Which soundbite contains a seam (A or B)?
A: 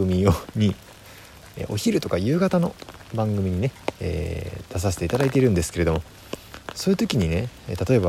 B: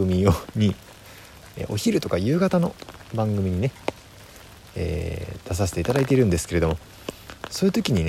A